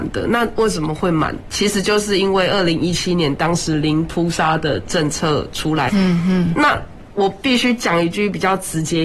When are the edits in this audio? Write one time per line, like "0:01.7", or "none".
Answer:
0:05.9